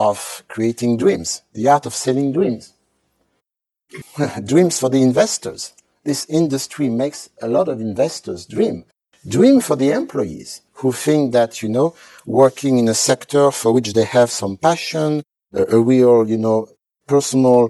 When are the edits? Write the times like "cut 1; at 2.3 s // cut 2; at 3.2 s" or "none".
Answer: cut 1; at 4.0 s // cut 2; at 10.7 s